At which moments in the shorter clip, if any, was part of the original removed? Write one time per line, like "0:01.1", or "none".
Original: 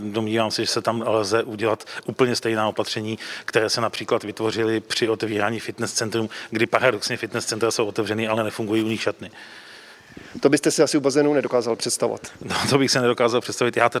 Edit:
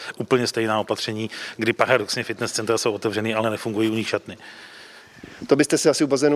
0:01.6